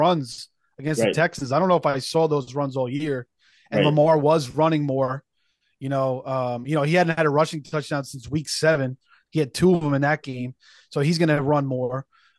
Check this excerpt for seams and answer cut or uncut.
uncut